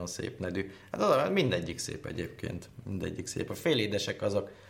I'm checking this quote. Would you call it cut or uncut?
uncut